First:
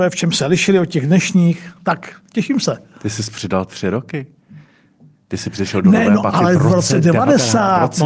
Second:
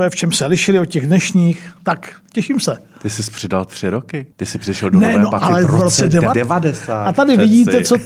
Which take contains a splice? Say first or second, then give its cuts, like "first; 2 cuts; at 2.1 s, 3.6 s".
second; 2 cuts; at 4.3 s, 6.3 s